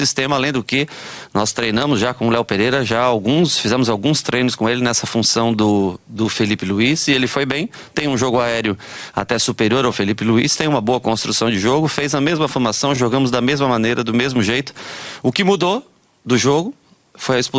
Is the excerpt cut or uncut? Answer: uncut